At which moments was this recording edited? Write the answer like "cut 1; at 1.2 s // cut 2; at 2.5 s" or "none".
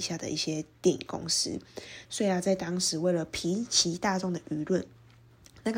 cut 1; at 2.0 s